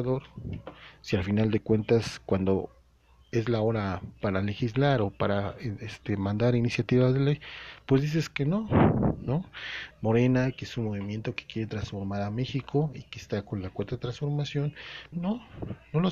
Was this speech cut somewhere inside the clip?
yes; 2 cuts; at 9.9 s, 15.1 s

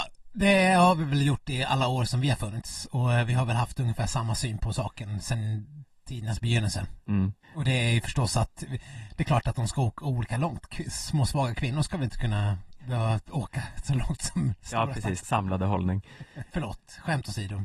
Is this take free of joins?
no; 3 cuts; at 7.4 s, 15.2 s, 16.5 s

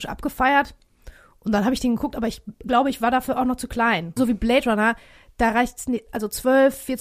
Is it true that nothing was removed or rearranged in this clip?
no; 1 cut; at 4.2 s

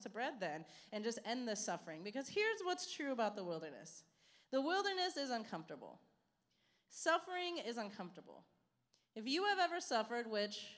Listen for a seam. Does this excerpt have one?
no; 0 cuts

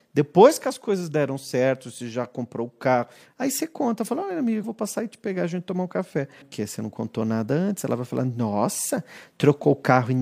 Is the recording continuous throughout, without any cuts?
no; 2 cuts; at 4.6 s, 6.4 s

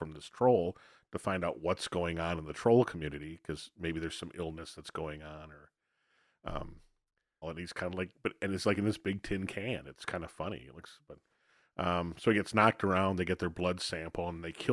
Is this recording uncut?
no; 1 cut; at 7.4 s

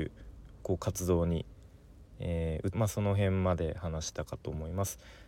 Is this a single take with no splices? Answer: no; 1 cut; at 2.7 s

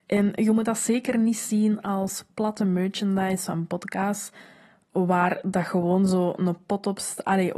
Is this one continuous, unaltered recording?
yes; 0 cuts

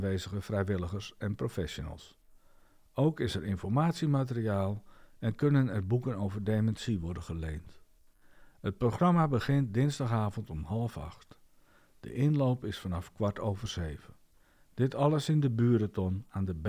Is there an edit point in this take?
no; 0 cuts

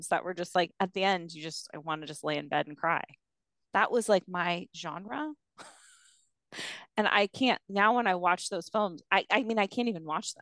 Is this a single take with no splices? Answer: yes; 0 cuts

